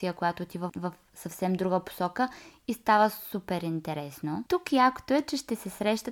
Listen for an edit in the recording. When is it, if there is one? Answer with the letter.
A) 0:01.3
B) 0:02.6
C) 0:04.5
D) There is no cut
C